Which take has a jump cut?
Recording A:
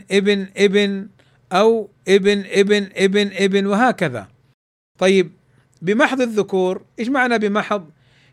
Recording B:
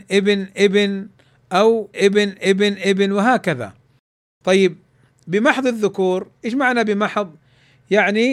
B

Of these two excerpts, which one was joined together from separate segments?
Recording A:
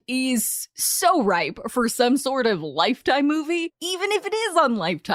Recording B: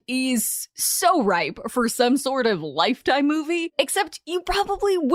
A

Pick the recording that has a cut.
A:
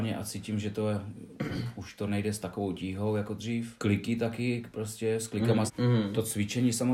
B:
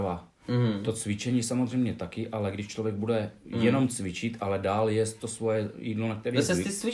A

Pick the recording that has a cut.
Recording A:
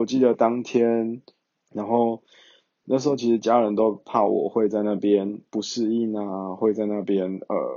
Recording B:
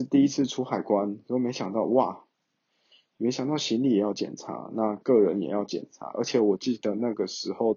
A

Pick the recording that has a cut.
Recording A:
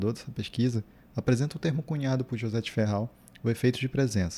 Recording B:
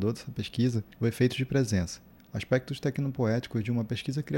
B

